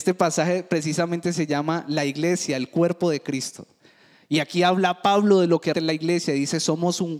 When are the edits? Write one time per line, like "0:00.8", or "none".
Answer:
0:05.7